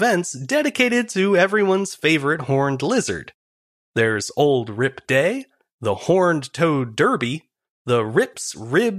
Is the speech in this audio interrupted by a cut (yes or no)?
no